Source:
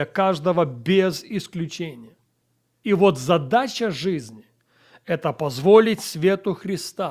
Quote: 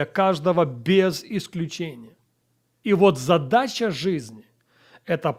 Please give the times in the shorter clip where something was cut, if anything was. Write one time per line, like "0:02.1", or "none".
none